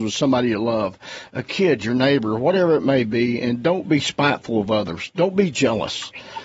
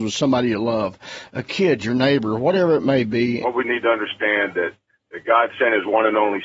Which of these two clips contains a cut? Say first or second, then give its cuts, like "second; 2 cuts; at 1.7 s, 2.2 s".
second; 1 cut; at 3.4 s